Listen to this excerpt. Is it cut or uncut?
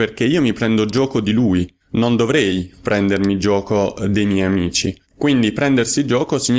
cut